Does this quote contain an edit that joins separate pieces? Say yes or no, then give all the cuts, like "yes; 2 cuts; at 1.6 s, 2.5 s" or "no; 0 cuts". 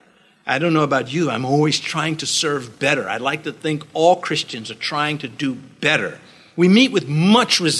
no; 0 cuts